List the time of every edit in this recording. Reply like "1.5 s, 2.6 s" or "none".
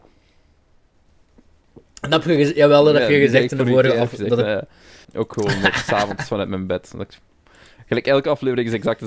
5.0 s